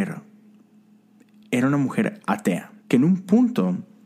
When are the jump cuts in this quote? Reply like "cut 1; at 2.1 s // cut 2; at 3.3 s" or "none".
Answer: cut 1; at 2.8 s